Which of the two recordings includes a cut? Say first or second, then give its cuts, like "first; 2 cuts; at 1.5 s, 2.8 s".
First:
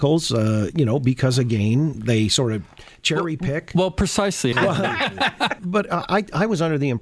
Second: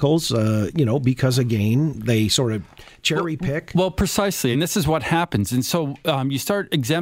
first; 2 cuts; at 4.5 s, 5.6 s